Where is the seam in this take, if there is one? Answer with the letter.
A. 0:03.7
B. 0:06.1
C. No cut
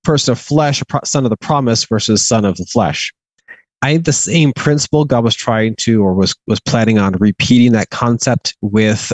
C